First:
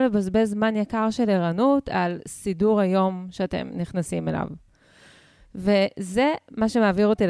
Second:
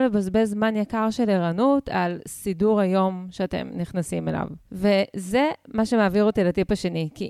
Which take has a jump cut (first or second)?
second